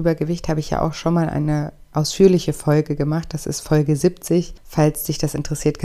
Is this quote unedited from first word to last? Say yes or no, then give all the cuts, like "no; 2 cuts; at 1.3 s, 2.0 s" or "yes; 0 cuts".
yes; 0 cuts